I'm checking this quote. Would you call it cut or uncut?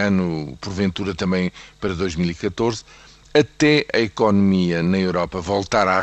uncut